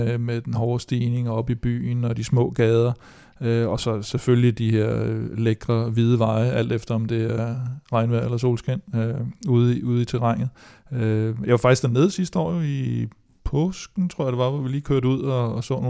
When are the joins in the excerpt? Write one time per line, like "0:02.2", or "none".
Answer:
none